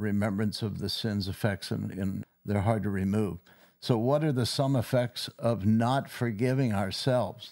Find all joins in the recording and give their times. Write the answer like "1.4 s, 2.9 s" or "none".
2.2 s